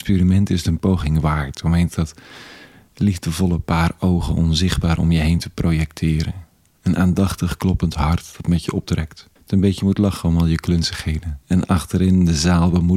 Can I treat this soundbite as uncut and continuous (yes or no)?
no